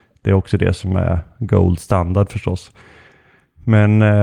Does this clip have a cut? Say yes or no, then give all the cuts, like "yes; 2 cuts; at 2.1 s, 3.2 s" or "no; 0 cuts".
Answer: no; 0 cuts